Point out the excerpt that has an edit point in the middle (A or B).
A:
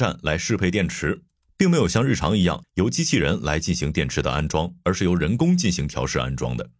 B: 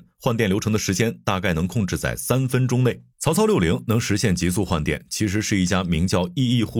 B